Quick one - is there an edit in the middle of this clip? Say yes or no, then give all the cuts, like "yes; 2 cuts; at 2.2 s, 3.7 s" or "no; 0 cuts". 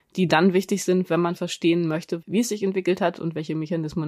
yes; 1 cut; at 2.2 s